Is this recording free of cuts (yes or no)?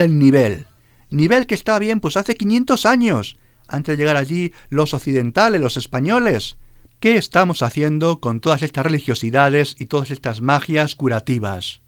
no